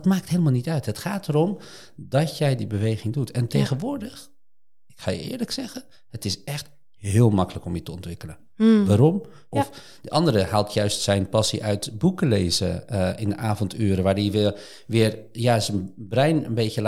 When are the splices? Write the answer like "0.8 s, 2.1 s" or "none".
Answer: 9.5 s